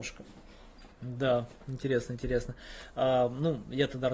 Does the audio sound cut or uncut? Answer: uncut